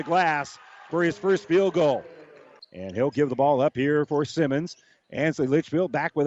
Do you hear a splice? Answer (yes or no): yes